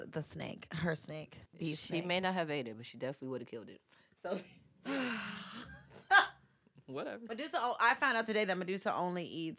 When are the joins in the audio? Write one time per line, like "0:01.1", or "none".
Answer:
0:01.5